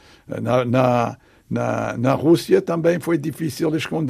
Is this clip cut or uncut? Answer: uncut